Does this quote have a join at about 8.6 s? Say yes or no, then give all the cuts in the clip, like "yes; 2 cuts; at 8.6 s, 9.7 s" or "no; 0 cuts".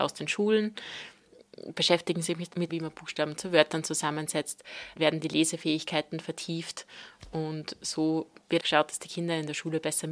yes; 2 cuts; at 2.7 s, 8.6 s